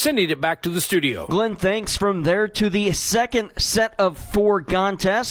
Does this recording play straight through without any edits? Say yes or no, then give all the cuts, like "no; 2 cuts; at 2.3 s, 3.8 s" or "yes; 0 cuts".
yes; 0 cuts